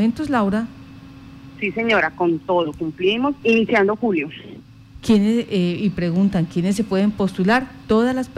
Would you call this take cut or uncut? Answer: cut